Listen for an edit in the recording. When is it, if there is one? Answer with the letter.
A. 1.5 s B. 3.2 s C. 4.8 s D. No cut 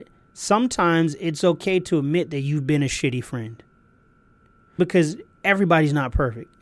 C